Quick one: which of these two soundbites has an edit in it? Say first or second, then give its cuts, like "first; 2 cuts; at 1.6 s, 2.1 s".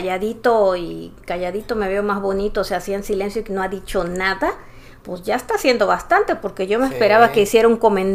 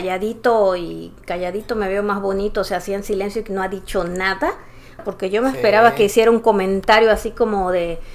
second; 1 cut; at 5.0 s